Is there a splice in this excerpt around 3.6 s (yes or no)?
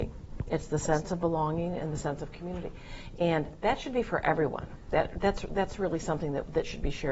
yes